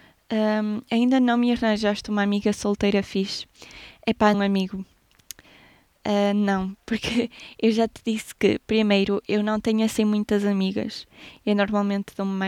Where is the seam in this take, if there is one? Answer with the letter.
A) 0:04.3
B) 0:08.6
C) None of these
A